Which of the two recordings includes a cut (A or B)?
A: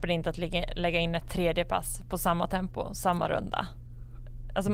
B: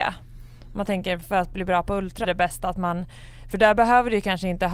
B